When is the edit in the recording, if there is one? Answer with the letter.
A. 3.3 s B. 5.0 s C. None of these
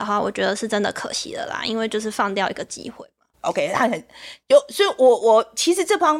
A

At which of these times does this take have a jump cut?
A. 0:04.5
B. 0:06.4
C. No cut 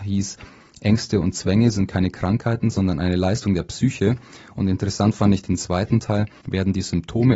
B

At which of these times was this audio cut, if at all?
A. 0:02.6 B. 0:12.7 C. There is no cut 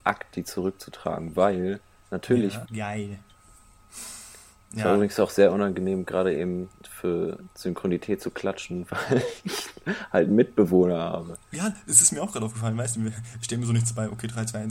A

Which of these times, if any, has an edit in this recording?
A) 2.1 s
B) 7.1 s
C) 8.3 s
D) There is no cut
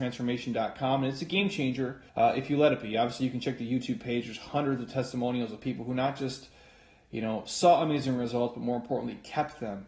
A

